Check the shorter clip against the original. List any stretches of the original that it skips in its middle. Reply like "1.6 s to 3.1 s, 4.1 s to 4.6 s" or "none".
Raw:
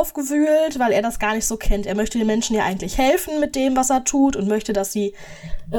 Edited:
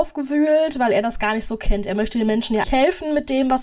2.6 s to 2.9 s